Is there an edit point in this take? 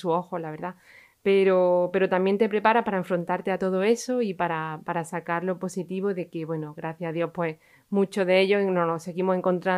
no; 0 cuts

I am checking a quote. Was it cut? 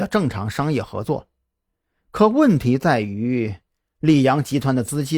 no; 0 cuts

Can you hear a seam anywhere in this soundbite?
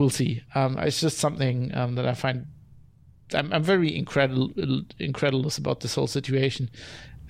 no; 0 cuts

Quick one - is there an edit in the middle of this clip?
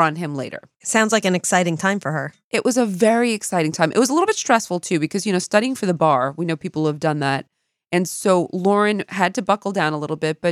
no; 0 cuts

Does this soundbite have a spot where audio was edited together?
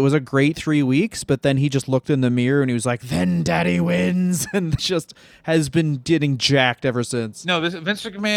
yes; 1 cut; at 4.8 s

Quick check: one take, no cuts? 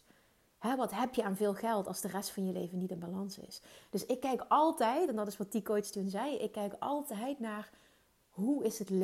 yes; 0 cuts

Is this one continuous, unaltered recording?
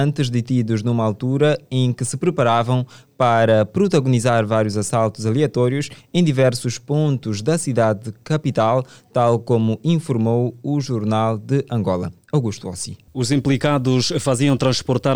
no; 1 cut; at 13.1 s

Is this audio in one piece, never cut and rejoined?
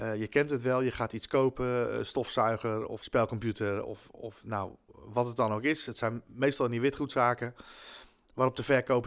yes; 0 cuts

